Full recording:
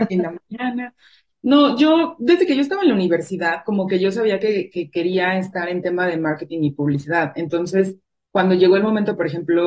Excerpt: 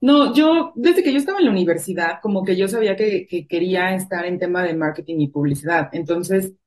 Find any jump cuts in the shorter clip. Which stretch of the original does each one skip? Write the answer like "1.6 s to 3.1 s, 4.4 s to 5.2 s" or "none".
none

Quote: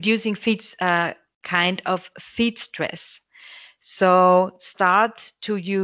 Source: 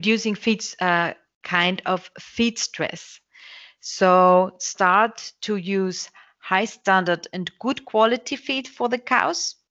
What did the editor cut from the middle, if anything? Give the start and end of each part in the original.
none

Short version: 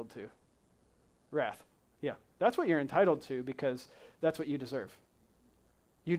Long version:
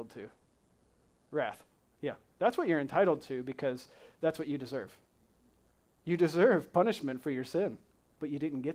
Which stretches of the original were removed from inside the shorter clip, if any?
none

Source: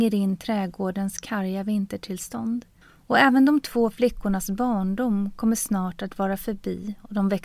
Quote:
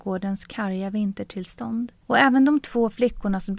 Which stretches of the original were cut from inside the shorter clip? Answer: 2.8 s to 3.0 s

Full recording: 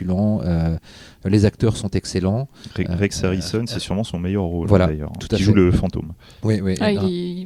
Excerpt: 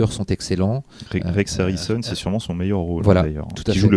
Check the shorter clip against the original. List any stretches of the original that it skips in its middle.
none

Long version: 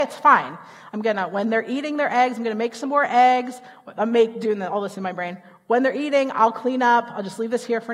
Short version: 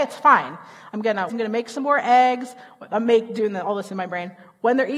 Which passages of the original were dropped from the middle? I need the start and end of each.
1.3 s to 2.4 s

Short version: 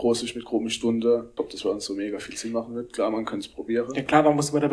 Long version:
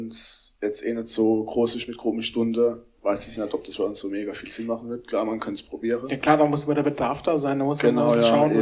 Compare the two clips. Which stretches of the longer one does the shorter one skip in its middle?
2.9 s to 3.5 s

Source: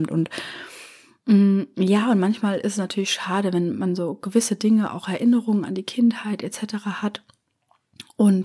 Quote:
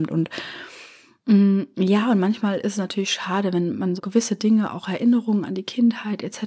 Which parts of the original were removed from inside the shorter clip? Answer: 4.0 s to 4.2 s

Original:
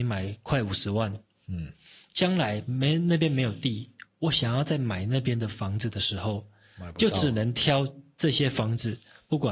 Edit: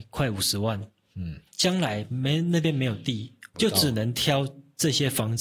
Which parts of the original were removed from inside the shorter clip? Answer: 1.8 s to 2.0 s, 4.1 s to 6.9 s

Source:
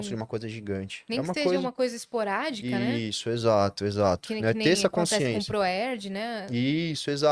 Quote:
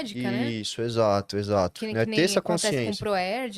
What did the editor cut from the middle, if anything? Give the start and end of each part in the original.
none

